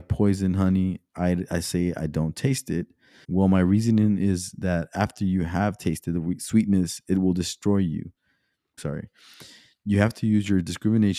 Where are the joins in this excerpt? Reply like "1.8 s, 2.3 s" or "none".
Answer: 3.2 s, 8.8 s